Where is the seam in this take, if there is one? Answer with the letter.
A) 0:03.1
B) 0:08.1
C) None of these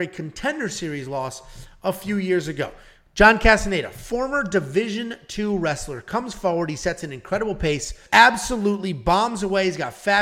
B